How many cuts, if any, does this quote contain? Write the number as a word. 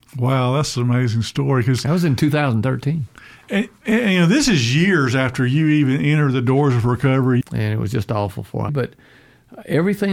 two